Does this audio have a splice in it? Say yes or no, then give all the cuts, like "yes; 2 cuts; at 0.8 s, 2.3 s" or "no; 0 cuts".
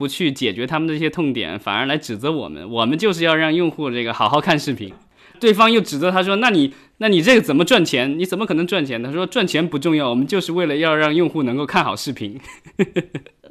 yes; 1 cut; at 4.9 s